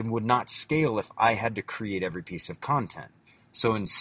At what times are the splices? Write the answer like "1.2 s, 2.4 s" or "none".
none